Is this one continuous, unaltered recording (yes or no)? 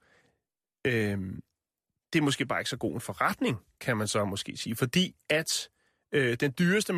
yes